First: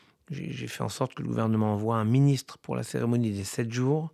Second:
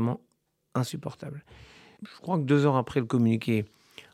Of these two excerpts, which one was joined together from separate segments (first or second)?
second